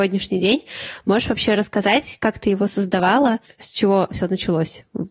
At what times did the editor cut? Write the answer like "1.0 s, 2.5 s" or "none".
none